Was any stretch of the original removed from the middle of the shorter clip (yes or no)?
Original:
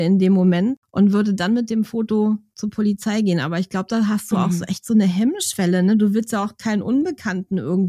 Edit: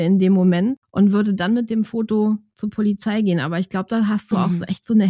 no